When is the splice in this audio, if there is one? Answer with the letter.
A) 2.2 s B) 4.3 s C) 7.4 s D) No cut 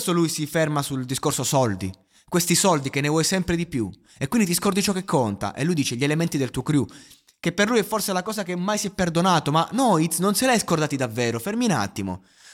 D